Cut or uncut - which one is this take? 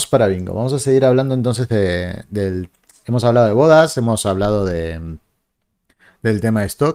uncut